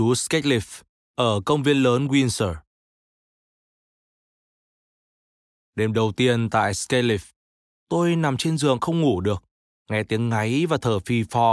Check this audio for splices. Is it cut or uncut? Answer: uncut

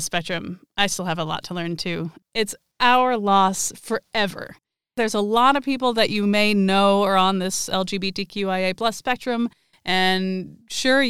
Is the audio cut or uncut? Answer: cut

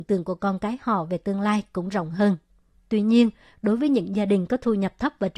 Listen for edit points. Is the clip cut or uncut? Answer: cut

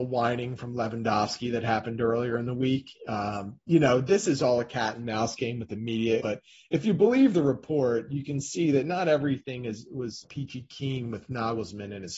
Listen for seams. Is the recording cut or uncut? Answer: cut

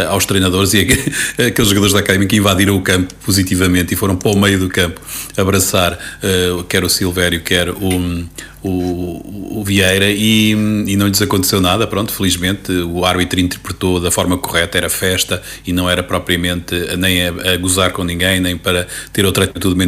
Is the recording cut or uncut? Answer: uncut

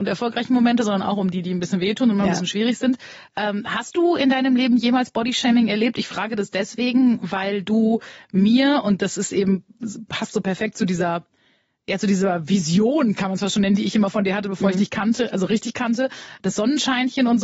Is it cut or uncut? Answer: uncut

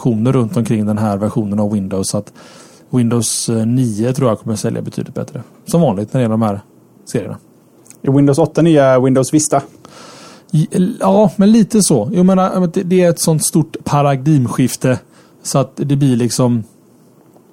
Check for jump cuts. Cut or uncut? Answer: uncut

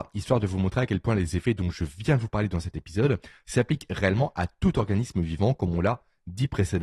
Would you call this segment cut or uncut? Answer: uncut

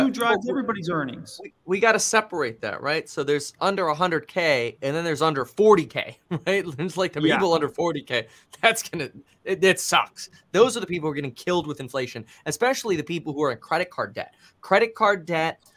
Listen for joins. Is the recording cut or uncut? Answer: uncut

